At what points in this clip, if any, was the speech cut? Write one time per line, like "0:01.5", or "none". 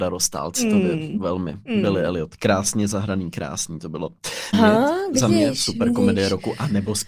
0:04.5